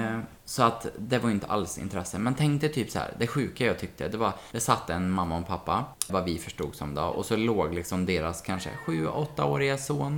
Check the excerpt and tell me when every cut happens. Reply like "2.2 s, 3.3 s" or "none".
6.1 s